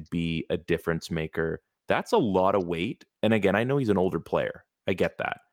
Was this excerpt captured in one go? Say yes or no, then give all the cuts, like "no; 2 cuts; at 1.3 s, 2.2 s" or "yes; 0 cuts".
yes; 0 cuts